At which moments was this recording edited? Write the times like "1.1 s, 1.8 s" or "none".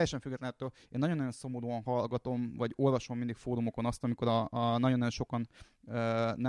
none